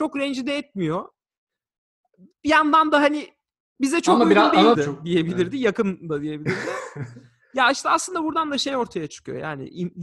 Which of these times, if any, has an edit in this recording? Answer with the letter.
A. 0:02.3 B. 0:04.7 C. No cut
B